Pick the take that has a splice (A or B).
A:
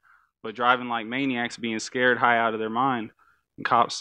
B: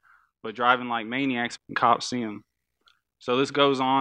B